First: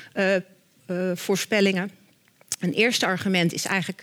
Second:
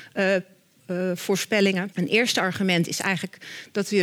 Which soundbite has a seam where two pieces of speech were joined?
second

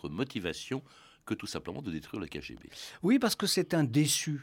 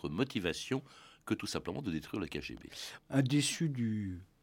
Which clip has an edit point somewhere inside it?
second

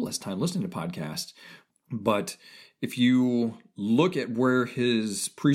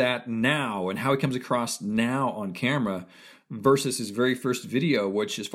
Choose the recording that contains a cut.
first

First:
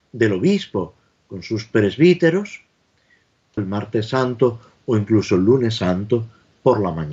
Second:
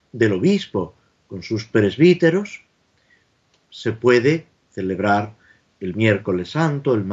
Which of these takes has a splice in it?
first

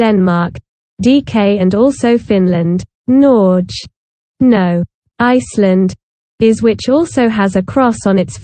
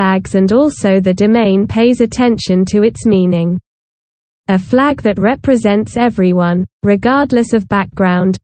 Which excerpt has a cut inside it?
first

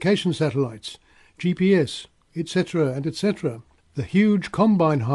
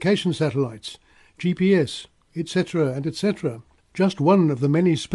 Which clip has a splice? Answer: second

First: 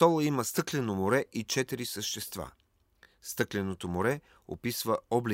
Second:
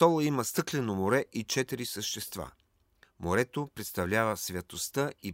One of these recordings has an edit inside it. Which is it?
second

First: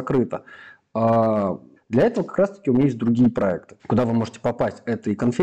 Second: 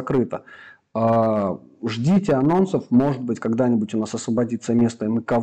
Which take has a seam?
first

